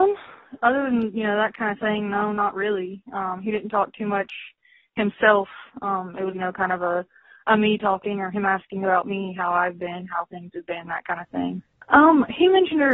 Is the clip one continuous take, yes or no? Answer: no